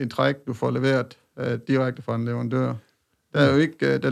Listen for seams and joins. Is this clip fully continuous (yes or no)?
yes